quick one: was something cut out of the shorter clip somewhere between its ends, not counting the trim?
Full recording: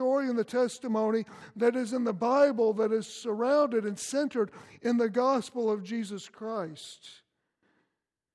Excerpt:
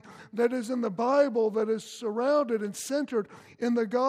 no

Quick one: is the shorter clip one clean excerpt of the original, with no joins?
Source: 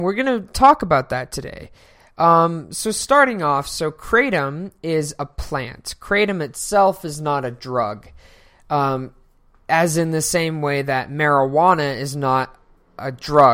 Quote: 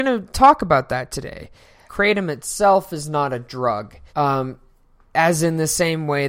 no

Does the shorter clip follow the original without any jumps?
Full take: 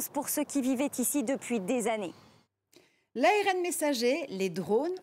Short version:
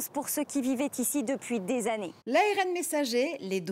no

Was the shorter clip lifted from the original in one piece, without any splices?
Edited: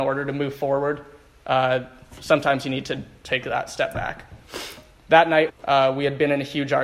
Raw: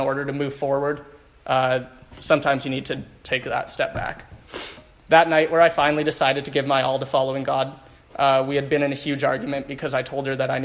no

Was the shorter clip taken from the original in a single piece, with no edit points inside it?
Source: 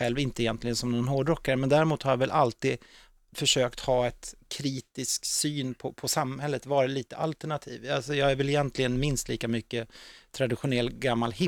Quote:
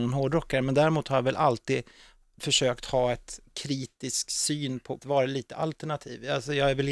no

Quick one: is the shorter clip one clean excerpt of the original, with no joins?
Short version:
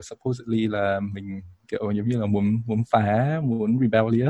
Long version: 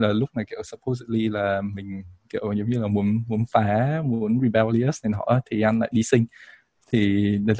yes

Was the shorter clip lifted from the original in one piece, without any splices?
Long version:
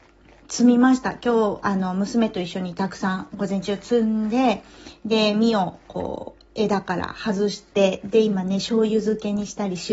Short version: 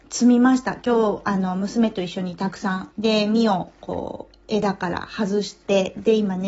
no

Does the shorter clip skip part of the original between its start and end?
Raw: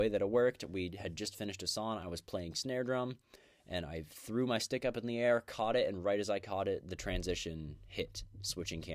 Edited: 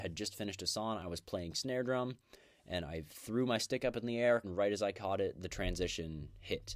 yes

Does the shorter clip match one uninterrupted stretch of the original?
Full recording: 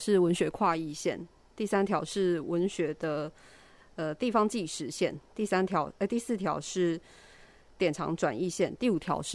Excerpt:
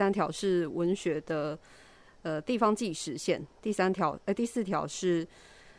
yes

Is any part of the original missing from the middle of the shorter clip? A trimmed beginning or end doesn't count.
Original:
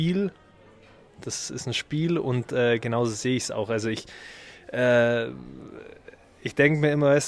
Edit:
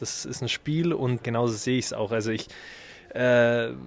yes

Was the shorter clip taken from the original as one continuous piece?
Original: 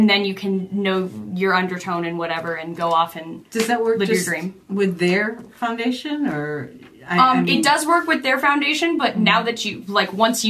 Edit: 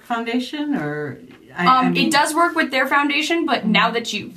yes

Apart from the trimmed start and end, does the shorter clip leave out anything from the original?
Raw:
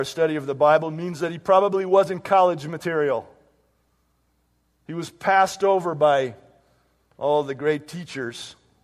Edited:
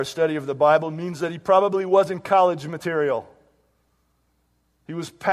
no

